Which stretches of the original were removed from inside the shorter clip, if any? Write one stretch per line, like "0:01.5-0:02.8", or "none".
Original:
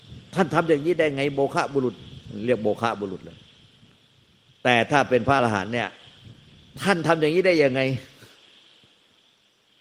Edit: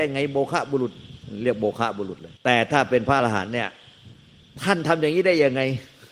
0:03.4-0:04.6